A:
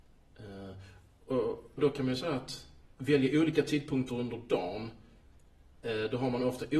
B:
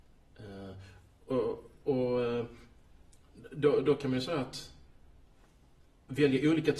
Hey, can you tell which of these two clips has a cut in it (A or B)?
A